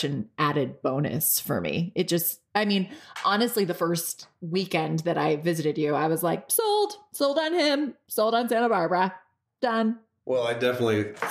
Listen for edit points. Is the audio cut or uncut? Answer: uncut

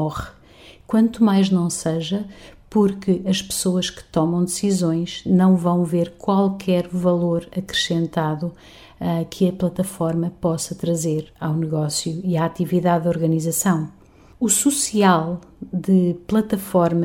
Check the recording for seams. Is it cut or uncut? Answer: uncut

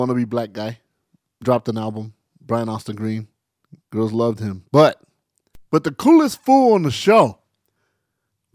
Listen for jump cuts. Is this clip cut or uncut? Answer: cut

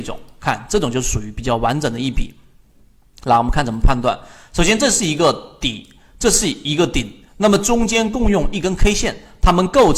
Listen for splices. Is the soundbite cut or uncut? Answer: uncut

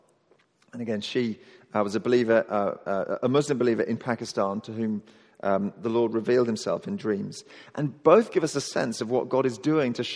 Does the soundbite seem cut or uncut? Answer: uncut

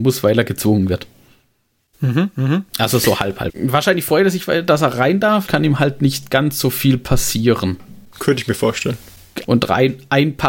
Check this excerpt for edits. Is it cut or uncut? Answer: cut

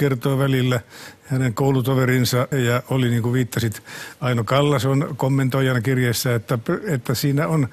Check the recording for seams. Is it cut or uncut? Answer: cut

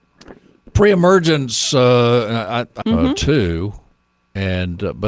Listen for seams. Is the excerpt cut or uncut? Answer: cut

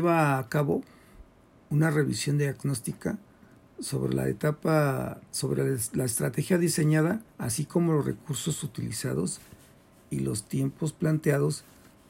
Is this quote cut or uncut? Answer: cut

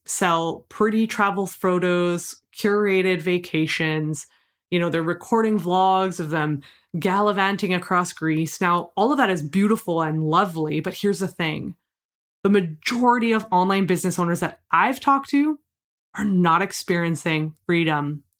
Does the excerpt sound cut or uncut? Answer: uncut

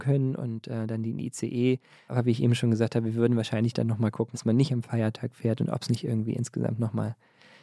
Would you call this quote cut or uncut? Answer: cut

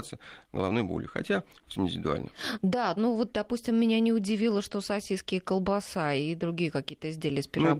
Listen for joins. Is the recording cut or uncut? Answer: cut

